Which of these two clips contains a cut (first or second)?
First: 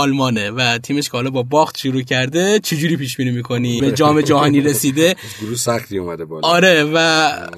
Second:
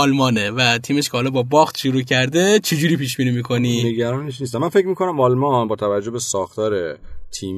first